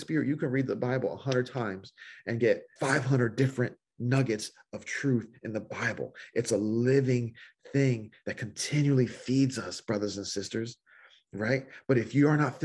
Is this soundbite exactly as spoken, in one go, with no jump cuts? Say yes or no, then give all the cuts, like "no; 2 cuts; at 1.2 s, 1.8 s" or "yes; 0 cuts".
no; 1 cut; at 2.8 s